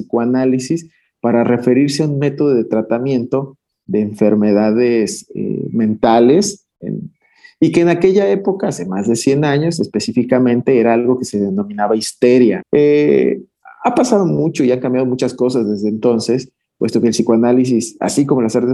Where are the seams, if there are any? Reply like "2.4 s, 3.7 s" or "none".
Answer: 12.6 s